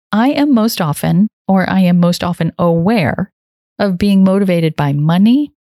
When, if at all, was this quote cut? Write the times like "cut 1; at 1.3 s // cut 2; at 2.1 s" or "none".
none